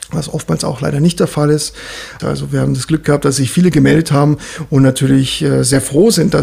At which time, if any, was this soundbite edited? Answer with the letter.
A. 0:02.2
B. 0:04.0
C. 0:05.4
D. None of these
A